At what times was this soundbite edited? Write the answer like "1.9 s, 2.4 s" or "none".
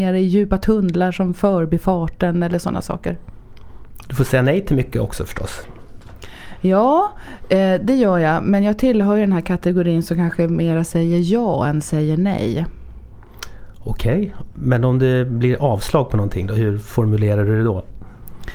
none